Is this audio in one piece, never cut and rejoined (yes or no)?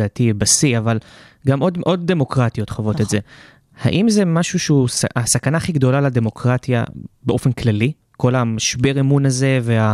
yes